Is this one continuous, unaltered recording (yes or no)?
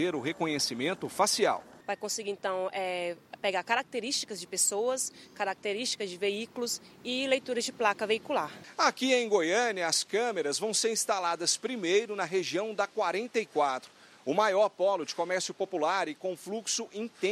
yes